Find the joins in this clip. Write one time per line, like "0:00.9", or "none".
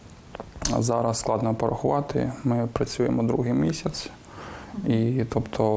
none